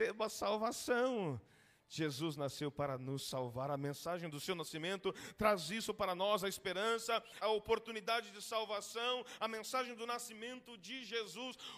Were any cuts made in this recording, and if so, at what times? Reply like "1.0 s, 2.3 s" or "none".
7.4 s

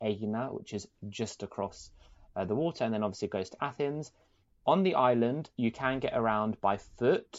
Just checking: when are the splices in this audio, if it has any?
4.5 s

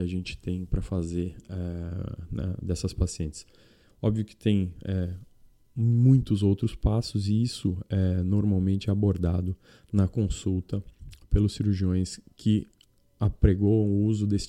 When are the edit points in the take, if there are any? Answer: none

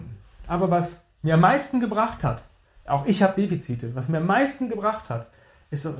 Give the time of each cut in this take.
none

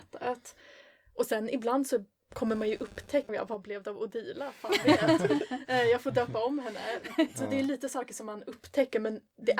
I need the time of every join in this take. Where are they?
3.3 s

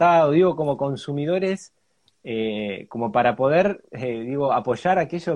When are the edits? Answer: none

